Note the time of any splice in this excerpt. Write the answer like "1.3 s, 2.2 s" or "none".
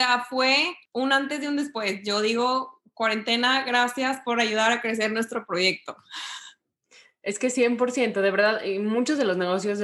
none